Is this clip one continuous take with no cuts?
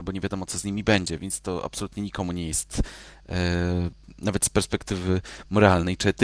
no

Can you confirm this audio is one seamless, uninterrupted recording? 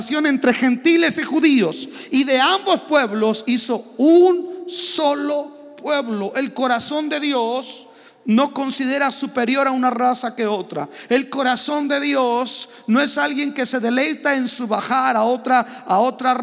yes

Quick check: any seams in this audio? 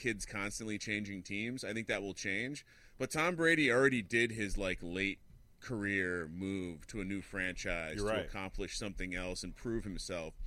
no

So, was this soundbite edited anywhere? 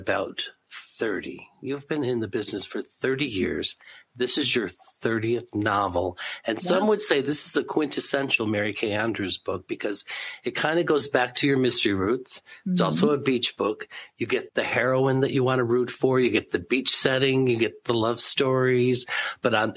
no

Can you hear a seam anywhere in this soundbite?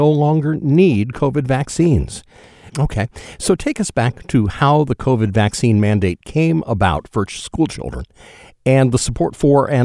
yes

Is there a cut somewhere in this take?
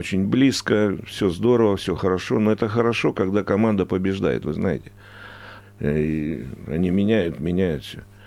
yes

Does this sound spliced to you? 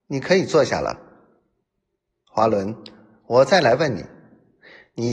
no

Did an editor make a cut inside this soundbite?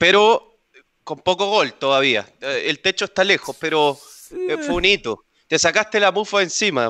no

